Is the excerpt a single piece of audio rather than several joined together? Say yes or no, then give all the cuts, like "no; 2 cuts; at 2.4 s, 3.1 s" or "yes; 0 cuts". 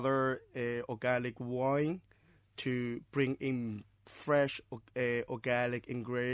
yes; 0 cuts